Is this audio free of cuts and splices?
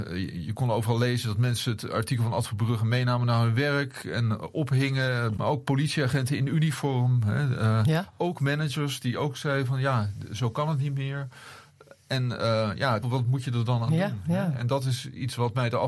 no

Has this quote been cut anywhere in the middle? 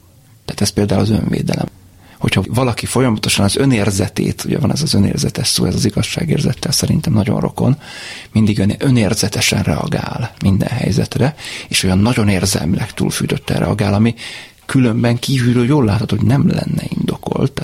no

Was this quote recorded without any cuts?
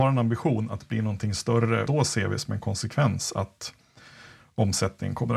no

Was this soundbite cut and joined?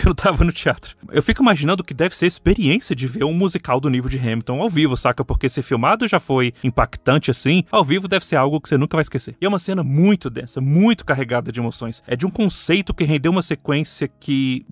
no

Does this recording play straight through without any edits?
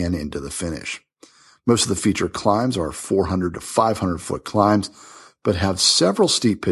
yes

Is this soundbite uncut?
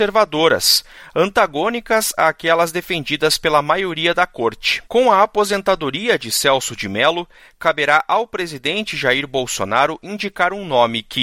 no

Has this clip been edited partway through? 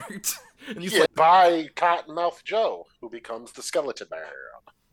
yes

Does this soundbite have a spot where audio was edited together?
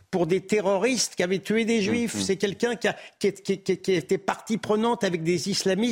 no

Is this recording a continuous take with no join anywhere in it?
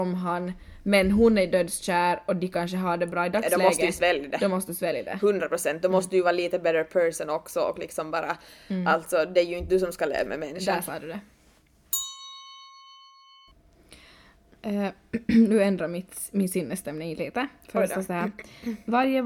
yes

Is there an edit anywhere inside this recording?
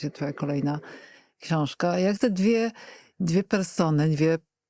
no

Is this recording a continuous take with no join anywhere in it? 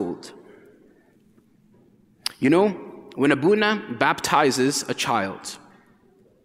yes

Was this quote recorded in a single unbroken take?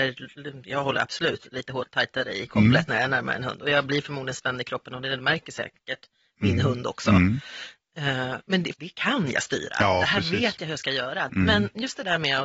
no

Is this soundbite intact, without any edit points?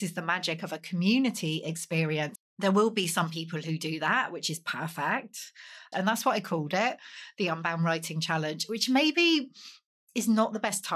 no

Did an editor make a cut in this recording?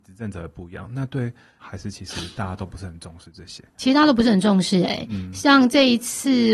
yes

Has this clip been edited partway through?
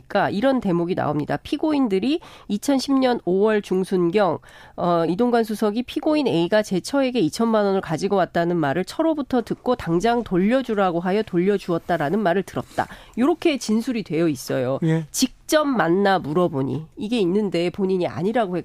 yes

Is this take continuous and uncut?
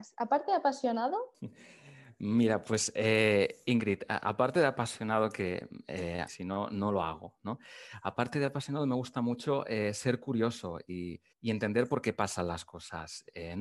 no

